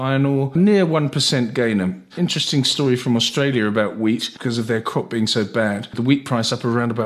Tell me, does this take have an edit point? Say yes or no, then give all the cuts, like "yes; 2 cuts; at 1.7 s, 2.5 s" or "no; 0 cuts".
yes; 1 cut; at 2.1 s